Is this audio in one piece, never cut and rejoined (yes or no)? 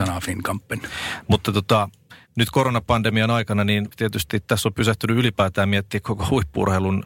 no